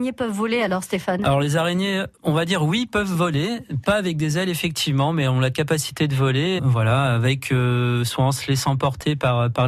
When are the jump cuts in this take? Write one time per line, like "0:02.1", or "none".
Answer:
0:02.2
0:06.6